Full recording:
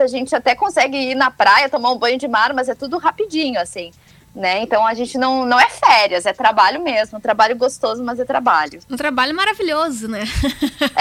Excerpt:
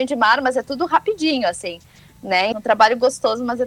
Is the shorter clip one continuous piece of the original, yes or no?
no